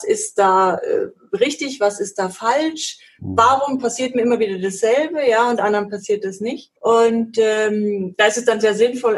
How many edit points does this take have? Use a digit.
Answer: 1